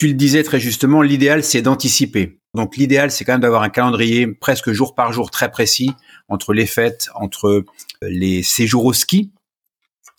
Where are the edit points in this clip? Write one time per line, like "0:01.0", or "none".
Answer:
0:02.5
0:08.0